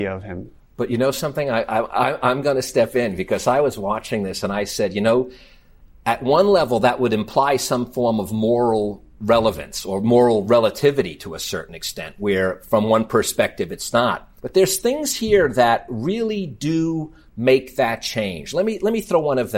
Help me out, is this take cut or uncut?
cut